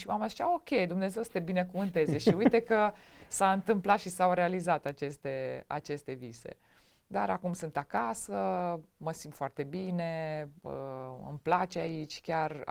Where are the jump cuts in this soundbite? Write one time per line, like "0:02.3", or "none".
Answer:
none